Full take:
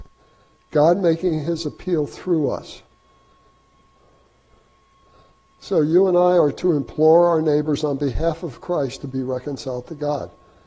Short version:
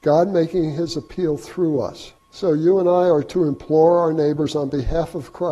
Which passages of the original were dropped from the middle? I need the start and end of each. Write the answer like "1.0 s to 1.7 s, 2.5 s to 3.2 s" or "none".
2.9 s to 5.5 s